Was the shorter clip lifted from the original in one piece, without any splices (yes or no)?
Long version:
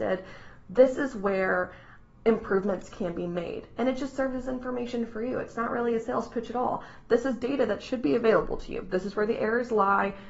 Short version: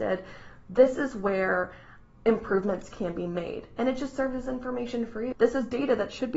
no